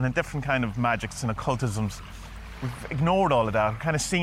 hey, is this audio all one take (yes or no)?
yes